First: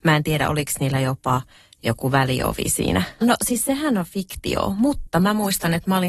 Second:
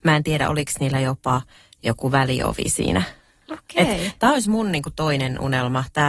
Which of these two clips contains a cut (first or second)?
first